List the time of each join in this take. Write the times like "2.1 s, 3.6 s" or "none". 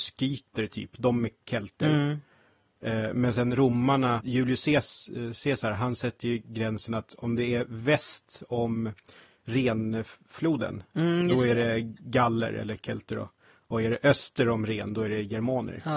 4.2 s